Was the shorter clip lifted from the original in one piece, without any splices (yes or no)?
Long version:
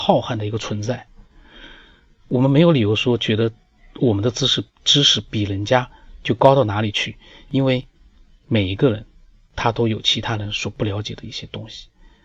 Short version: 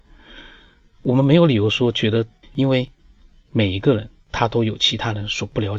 no